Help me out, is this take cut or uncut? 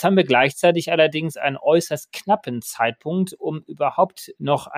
uncut